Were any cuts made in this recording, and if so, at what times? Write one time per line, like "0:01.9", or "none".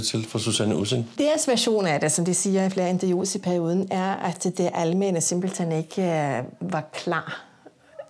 0:01.2